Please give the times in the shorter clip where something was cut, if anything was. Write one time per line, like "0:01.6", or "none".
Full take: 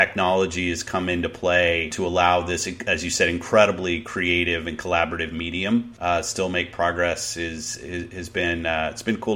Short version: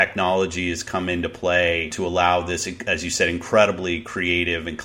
none